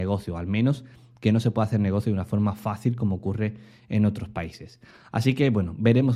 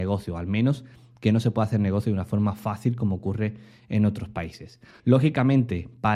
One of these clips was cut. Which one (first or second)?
second